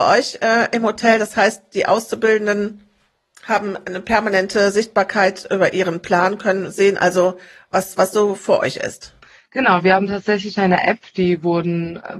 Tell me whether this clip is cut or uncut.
uncut